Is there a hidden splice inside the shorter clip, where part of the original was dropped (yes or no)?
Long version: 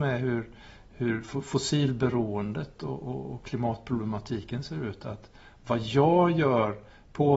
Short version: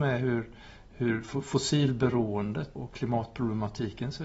yes